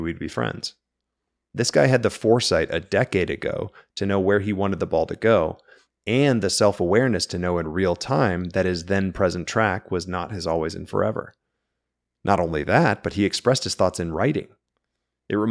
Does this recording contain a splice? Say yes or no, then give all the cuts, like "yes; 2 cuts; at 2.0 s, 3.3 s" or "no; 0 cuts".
no; 0 cuts